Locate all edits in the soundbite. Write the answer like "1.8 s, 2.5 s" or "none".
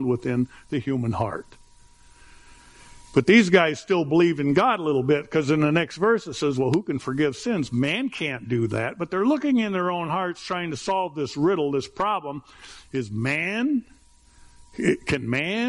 none